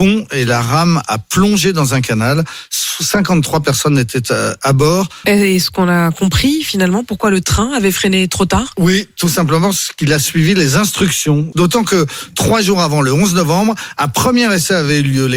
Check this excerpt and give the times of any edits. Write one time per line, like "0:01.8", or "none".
0:05.2
0:11.5